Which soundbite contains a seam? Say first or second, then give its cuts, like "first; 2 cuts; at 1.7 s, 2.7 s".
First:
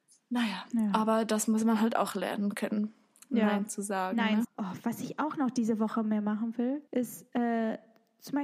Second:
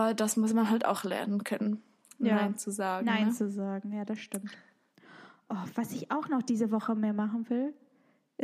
first; 2 cuts; at 4.4 s, 6.9 s